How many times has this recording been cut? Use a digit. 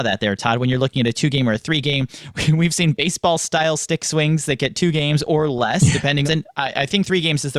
1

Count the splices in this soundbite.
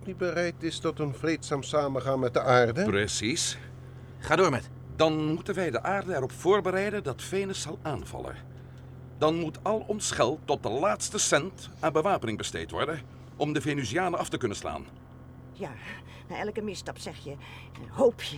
2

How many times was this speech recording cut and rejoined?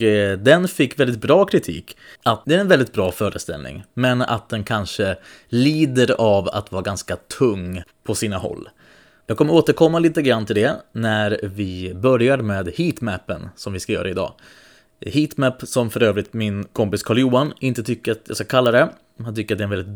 1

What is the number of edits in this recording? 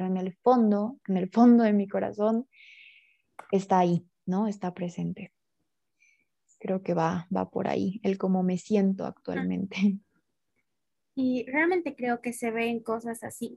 0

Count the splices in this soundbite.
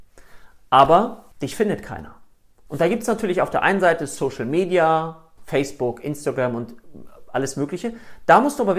2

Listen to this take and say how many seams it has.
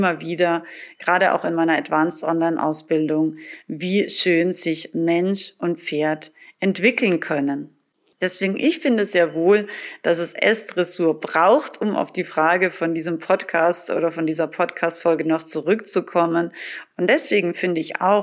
2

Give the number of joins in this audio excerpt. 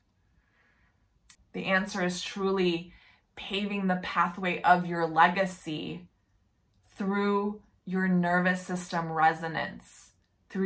1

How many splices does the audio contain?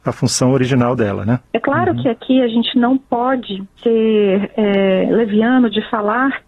1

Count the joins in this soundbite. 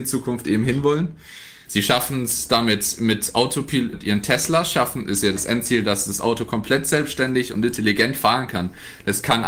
2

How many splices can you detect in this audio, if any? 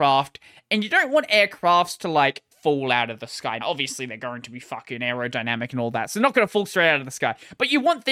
2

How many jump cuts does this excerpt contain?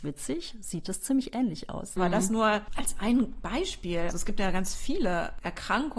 2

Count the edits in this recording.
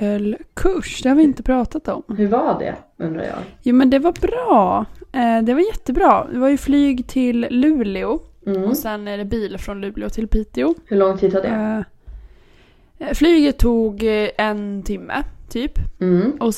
0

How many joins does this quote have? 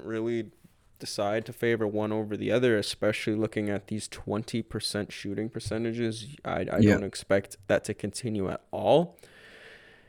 0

